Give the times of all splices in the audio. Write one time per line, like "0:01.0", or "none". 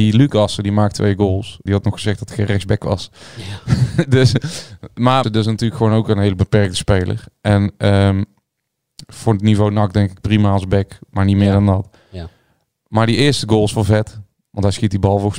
0:01.7
0:05.2